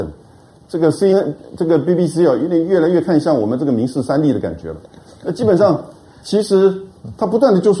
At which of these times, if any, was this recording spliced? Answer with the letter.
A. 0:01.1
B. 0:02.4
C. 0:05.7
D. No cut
A